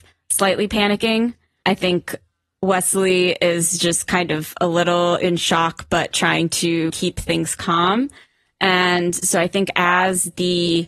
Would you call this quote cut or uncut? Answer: uncut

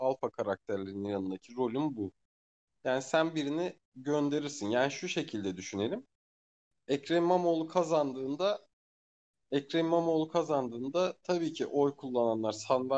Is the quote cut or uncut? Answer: uncut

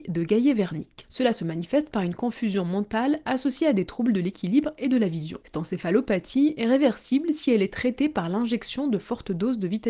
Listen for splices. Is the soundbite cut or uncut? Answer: uncut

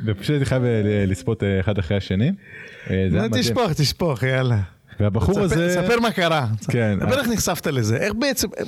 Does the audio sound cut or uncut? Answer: uncut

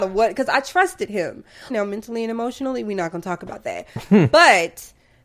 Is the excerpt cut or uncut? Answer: cut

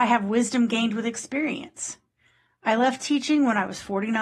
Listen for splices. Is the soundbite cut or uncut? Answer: uncut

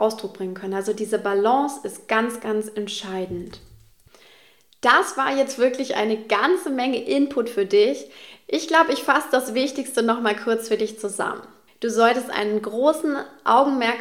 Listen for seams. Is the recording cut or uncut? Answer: cut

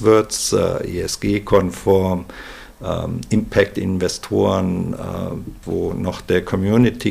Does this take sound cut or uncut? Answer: cut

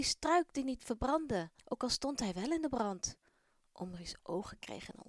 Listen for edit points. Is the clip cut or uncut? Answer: cut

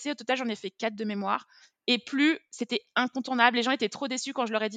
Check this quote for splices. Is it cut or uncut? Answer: uncut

